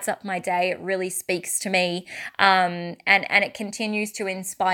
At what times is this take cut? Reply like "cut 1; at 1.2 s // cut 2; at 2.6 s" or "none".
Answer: none